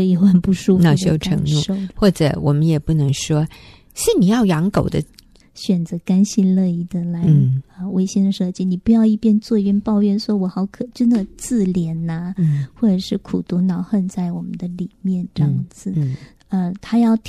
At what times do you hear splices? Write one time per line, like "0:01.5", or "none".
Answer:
0:05.4
0:16.4